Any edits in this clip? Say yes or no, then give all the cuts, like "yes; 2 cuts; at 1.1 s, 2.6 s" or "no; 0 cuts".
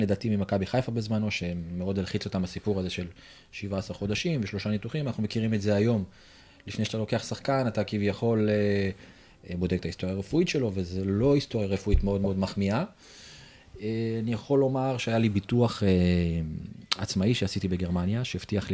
no; 0 cuts